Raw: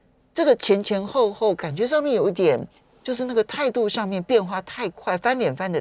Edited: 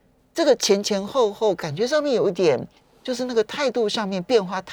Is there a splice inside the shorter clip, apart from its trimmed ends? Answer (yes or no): no